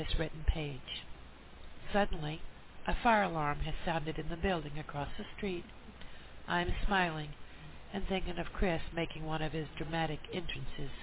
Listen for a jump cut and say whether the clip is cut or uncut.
uncut